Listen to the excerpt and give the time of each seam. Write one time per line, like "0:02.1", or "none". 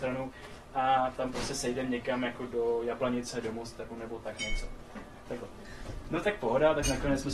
0:05.3